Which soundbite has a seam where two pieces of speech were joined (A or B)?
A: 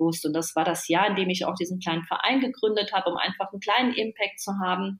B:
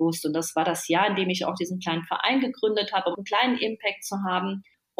B